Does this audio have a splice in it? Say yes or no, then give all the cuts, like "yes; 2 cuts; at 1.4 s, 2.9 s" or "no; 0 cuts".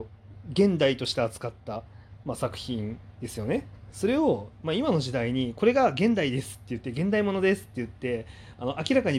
no; 0 cuts